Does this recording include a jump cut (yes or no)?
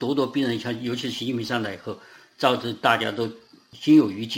no